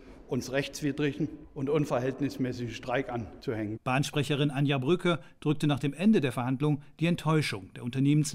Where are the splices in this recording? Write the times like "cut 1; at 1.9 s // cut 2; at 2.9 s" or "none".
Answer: none